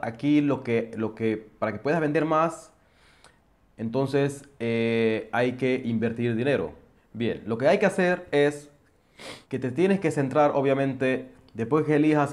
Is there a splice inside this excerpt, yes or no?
yes